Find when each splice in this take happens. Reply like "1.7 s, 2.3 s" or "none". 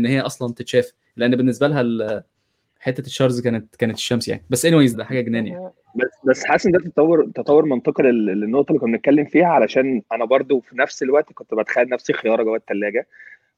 4.9 s

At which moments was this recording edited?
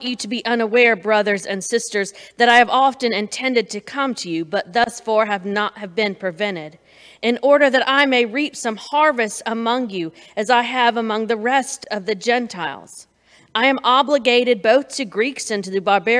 none

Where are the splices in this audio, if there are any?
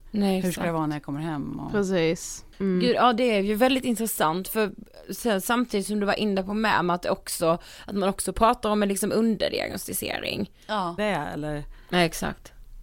2.5 s, 11.0 s

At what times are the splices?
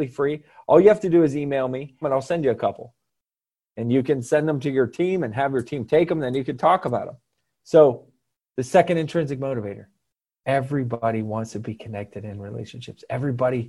2.0 s, 7.6 s

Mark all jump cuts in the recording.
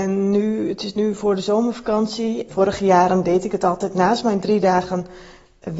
2.5 s

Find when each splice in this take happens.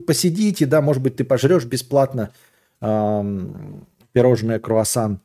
none

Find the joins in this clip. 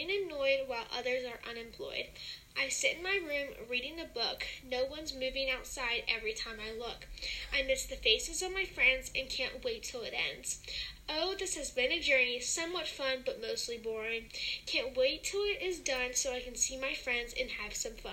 none

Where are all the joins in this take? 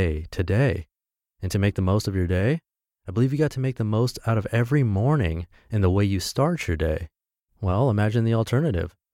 7.5 s

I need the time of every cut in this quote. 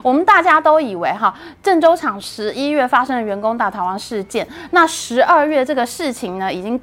none

